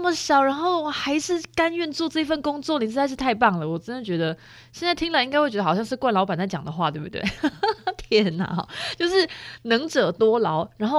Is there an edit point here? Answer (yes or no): no